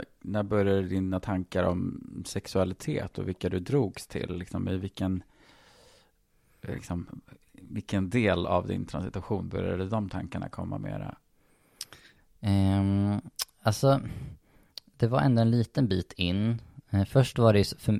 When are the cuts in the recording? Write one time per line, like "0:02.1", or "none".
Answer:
none